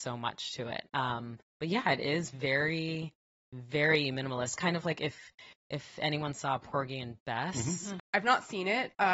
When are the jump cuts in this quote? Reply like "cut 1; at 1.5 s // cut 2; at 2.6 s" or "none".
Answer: cut 1; at 8.0 s